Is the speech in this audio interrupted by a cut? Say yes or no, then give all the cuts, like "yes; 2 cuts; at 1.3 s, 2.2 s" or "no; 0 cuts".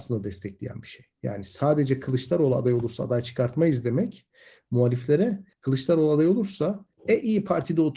no; 0 cuts